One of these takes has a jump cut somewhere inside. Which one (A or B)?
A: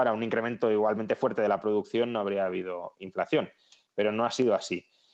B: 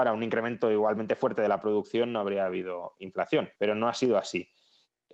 B